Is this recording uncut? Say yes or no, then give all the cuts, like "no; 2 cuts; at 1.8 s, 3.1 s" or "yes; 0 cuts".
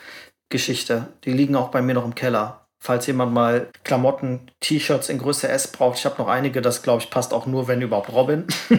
no; 1 cut; at 3.7 s